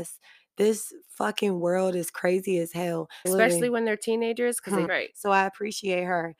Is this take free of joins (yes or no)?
no